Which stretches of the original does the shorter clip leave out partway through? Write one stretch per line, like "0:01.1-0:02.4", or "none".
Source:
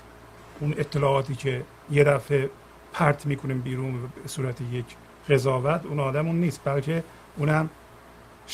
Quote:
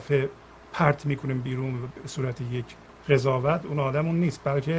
none